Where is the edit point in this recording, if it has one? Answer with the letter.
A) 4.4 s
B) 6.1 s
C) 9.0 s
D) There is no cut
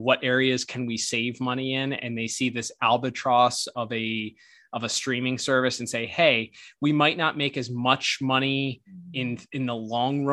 D